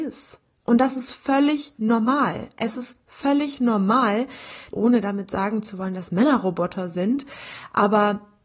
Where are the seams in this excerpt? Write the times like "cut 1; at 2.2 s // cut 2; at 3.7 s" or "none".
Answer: cut 1; at 4.7 s